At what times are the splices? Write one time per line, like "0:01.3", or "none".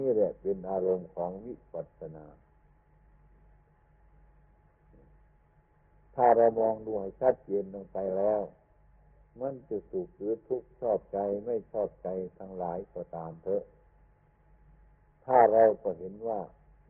none